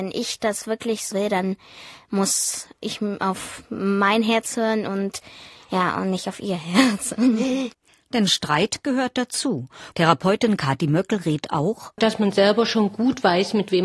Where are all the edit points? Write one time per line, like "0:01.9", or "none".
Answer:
0:09.9
0:12.0